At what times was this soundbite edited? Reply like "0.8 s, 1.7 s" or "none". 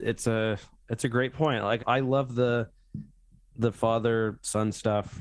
1.8 s